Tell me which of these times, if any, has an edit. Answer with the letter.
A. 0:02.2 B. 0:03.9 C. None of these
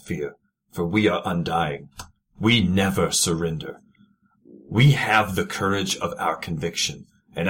C